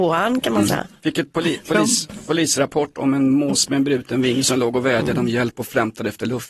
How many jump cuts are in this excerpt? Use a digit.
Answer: 0